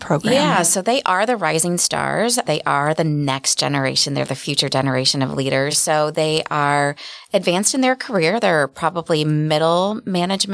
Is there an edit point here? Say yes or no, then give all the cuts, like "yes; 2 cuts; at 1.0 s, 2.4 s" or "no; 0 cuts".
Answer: no; 0 cuts